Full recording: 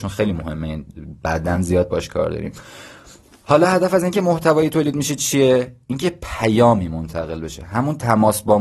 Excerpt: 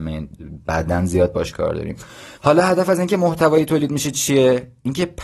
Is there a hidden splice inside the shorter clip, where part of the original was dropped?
yes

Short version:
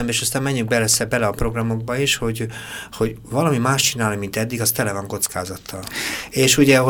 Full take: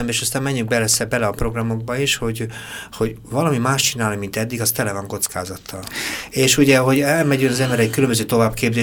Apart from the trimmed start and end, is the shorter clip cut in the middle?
no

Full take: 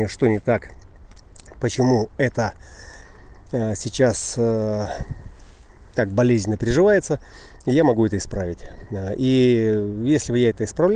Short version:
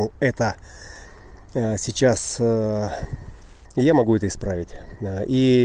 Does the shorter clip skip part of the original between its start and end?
yes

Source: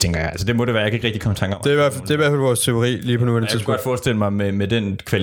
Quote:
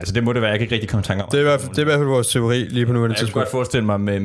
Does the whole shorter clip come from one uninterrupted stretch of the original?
yes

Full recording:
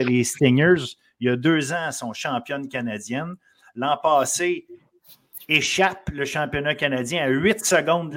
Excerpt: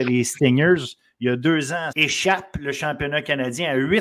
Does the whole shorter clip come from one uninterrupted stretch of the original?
no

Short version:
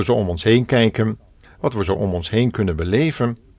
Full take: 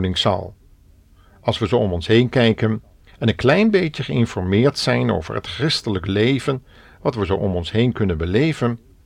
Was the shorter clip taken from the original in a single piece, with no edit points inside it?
no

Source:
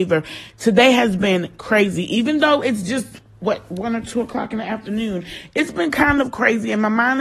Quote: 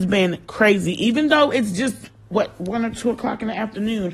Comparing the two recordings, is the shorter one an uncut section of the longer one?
yes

